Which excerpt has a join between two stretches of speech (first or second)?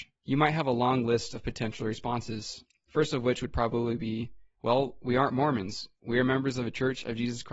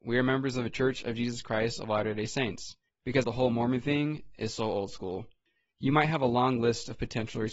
second